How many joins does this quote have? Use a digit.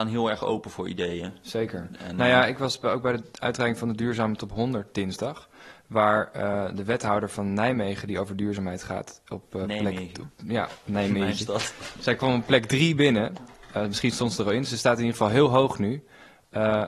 0